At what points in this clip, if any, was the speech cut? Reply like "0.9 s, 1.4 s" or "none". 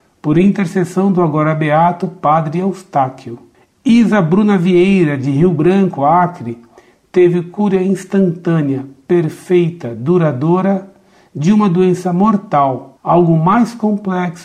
none